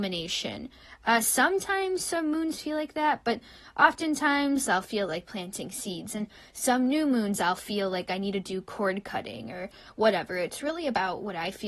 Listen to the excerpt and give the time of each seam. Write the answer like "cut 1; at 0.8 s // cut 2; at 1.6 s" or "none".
cut 1; at 4.7 s